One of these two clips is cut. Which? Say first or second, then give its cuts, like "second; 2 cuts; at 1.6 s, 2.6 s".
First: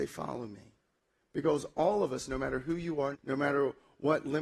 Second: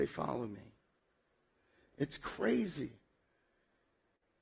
first; 2 cuts; at 1.1 s, 3.1 s